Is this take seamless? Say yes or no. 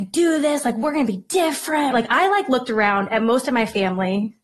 no